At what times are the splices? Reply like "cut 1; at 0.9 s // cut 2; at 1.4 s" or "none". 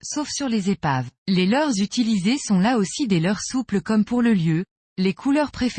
cut 1; at 1.2 s